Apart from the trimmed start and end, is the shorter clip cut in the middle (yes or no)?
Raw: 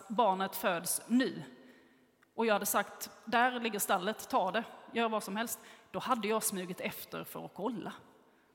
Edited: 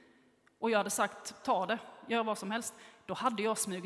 yes